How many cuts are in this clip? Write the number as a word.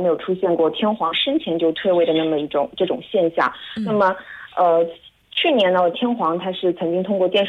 zero